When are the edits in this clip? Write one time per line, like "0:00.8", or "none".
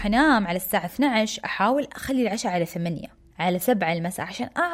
0:03.3